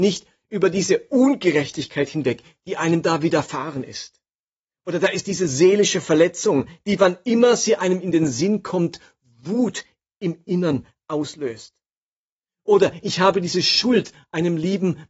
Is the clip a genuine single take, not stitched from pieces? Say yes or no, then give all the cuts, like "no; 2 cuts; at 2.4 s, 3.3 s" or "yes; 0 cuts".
yes; 0 cuts